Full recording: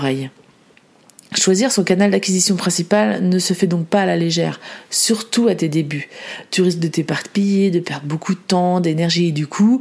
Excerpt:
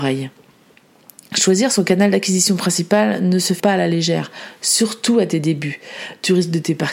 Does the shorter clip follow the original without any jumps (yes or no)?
no